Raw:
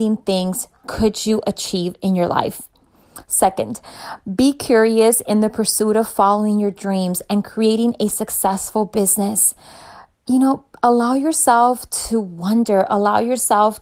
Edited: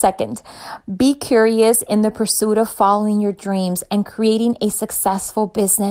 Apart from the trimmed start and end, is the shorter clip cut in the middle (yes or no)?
no